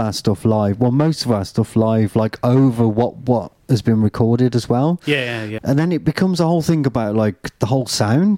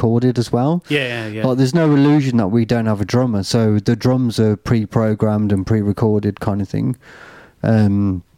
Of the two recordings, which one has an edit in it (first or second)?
first